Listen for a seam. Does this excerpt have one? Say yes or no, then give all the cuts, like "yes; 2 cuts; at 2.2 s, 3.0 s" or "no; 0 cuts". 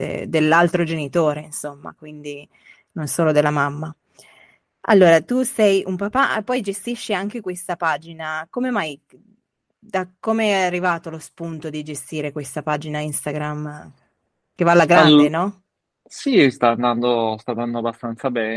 no; 0 cuts